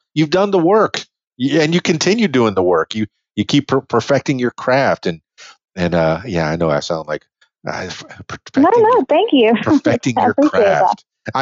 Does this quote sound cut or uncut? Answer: uncut